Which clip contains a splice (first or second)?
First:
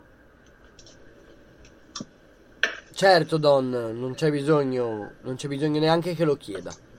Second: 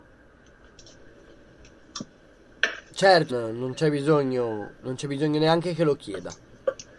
second